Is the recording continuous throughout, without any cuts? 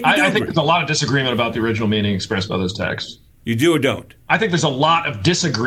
no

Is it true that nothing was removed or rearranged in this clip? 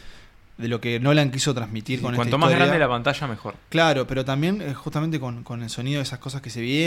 yes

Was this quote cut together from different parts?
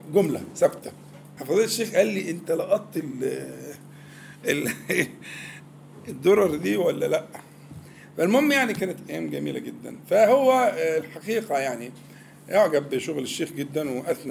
yes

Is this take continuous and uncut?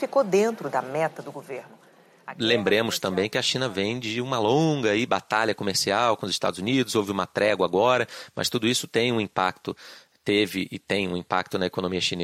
yes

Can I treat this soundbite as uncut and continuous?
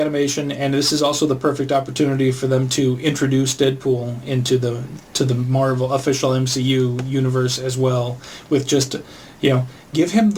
yes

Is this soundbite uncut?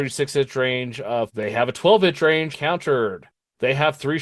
no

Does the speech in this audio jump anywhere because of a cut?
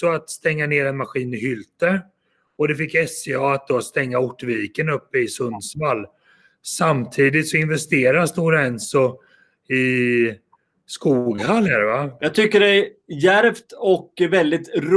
yes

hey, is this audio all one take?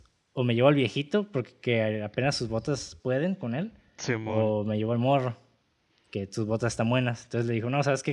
yes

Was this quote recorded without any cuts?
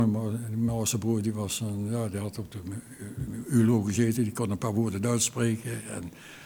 yes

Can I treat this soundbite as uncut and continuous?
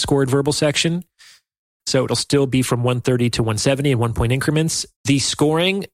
no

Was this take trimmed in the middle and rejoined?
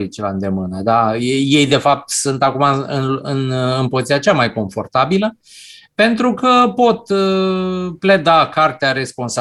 no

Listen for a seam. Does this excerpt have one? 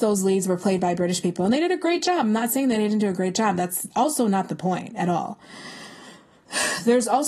no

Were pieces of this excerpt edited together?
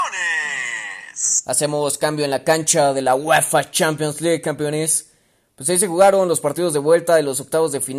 no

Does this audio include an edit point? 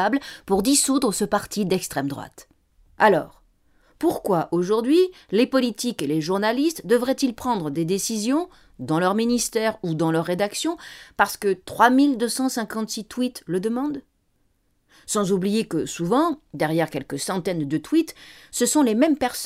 no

